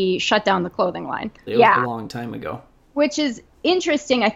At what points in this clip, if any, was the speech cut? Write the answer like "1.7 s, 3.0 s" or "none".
1.5 s

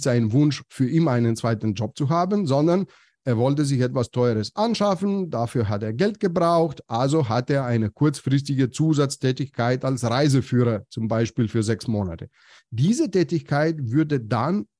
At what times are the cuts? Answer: none

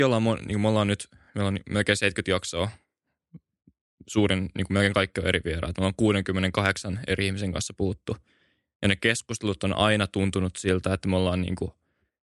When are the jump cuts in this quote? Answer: none

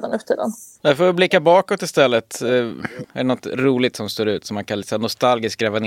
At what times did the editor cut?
3.0 s

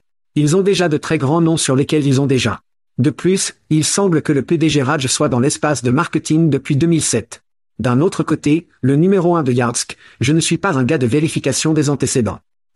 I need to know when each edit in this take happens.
none

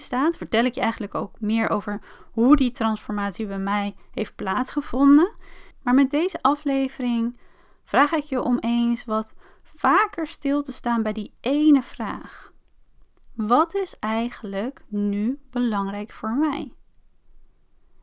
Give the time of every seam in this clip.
5.7 s

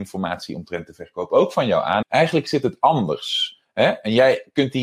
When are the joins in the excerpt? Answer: 2.0 s

